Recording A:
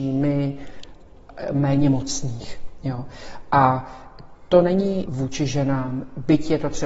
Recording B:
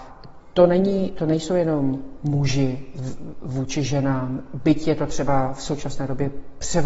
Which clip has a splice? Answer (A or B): A